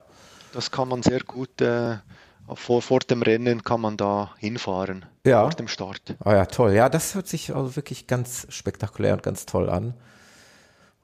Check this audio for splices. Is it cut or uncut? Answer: uncut